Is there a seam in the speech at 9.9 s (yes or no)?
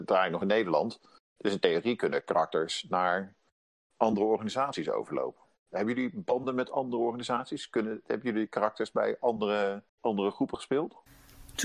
yes